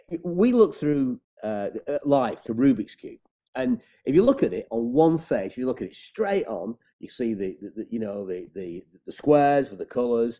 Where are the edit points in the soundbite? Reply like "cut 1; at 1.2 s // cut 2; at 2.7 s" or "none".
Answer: cut 1; at 2.4 s // cut 2; at 8.5 s